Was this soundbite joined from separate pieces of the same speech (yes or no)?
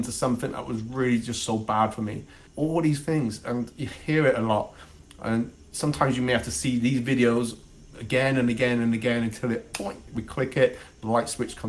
yes